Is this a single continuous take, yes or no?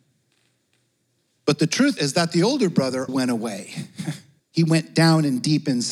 no